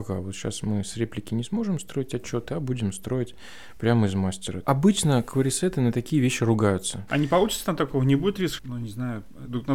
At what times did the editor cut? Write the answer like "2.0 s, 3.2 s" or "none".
4.6 s, 7.1 s, 8.6 s